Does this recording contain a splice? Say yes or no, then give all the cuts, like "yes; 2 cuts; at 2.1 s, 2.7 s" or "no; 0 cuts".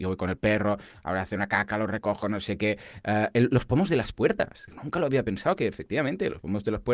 no; 0 cuts